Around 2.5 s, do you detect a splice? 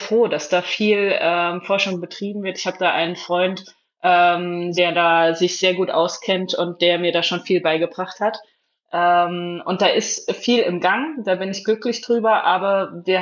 no; 1 cut; at 4.7 s

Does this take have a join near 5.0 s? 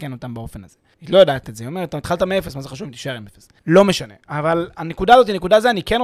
no; 2 cuts; at 0.9 s, 3.6 s

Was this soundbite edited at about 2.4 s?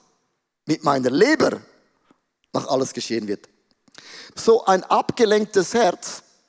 no; 1 cut; at 4.3 s

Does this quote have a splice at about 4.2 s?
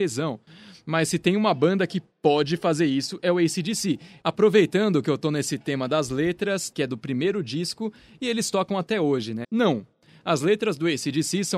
yes; 3 cuts; at 4.2 s, 6.7 s, 9.4 s

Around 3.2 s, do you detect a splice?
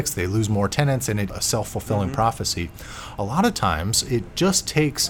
no; 1 cut; at 1.3 s

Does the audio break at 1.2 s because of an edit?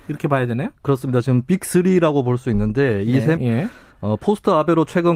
no; 1 cut; at 3.4 s

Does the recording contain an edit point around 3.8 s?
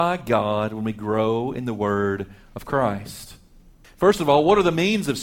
yes; 1 cut; at 3.8 s

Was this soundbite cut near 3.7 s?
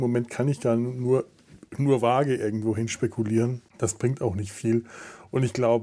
yes; 1 cut; at 3.7 s

